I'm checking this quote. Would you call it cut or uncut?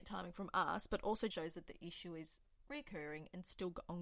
cut